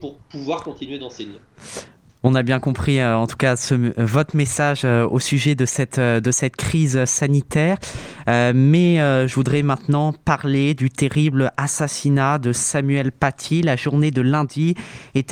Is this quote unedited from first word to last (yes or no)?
yes